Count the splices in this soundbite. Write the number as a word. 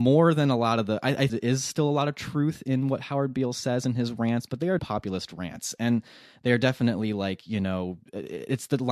two